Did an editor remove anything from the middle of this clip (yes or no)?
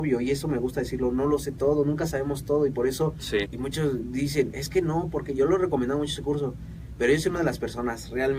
yes